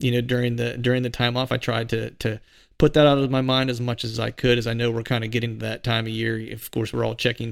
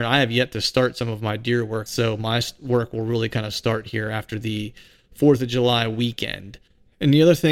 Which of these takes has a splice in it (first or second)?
second